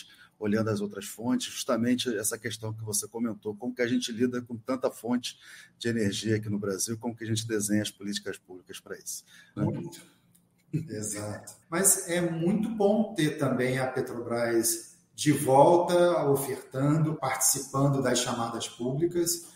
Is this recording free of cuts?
no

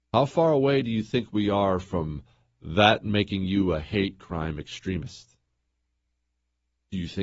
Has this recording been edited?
no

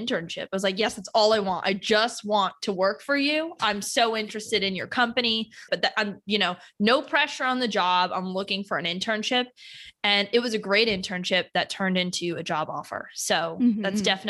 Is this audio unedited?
no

